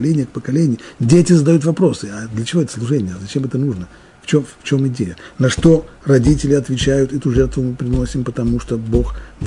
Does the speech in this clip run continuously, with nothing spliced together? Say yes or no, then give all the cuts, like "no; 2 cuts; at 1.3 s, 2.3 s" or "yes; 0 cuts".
yes; 0 cuts